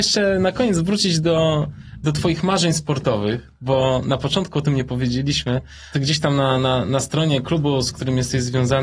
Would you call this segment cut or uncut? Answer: cut